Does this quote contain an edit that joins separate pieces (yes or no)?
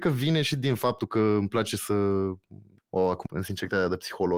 yes